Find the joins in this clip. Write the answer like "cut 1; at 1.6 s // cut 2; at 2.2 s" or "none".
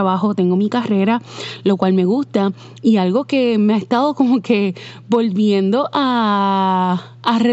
none

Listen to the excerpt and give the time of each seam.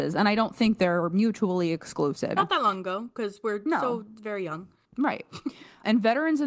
cut 1; at 2.4 s

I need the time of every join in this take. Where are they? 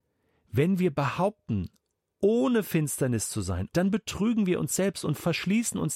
cut 1; at 3.7 s

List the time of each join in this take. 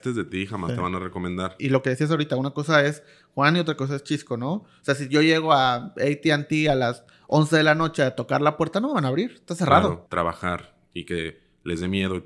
cut 1; at 1.6 s // cut 2; at 10.1 s

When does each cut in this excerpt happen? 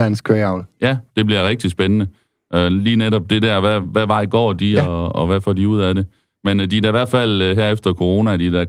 cut 1; at 3.8 s

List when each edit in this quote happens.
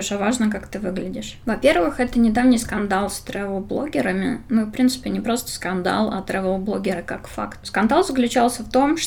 cut 1; at 1.4 s

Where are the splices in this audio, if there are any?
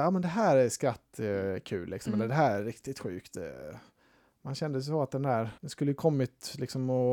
cut 1; at 5.6 s

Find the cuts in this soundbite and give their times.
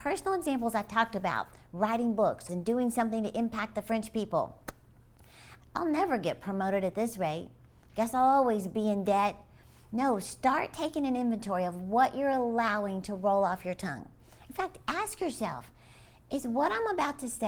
cut 1; at 2.5 s // cut 2; at 5.6 s

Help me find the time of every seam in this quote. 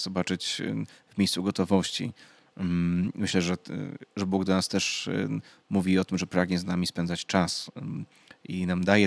none

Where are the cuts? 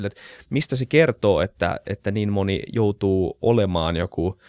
cut 1; at 1.8 s

